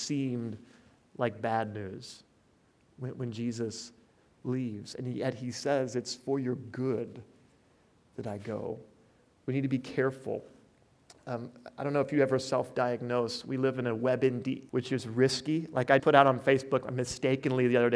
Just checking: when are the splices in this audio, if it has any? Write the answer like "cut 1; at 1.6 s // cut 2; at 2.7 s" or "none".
cut 1; at 14.7 s // cut 2; at 16.0 s